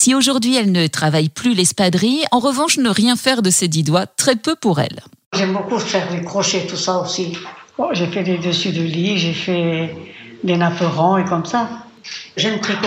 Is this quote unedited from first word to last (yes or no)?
yes